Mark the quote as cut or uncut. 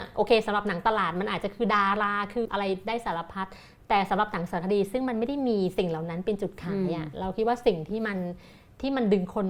cut